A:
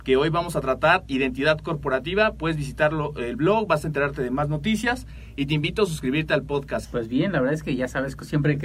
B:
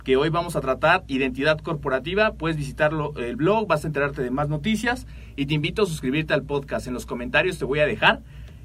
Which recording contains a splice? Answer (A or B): A